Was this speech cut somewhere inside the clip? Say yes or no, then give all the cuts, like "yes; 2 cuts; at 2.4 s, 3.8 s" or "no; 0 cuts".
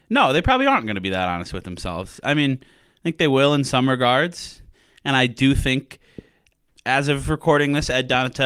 no; 0 cuts